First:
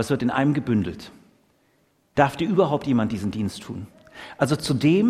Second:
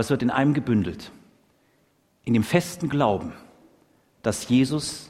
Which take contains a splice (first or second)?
first